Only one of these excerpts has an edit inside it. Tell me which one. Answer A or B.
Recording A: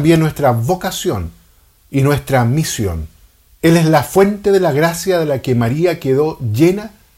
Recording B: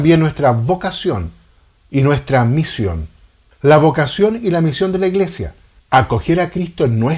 A